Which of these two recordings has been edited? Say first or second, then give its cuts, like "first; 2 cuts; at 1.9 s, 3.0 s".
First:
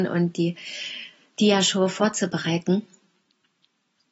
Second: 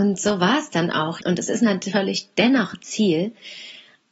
second; 1 cut; at 1.2 s